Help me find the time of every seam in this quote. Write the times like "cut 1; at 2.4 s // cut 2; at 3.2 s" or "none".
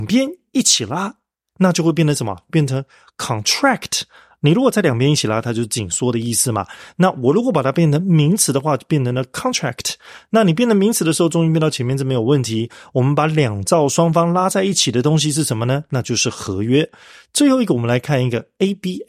none